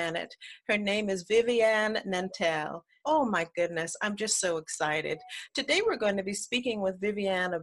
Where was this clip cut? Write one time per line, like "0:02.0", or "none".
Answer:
0:03.0